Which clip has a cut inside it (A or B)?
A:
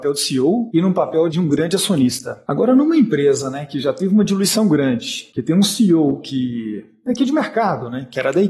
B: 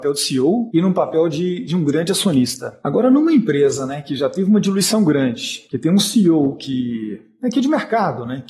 A